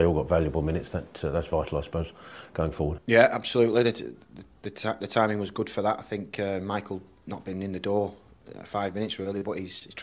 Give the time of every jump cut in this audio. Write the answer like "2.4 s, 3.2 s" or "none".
none